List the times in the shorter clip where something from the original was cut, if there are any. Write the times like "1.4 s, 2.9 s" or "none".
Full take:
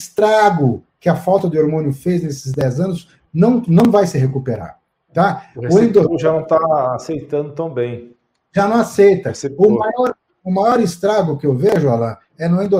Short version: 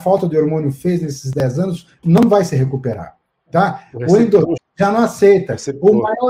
2.0 s, 4.6 s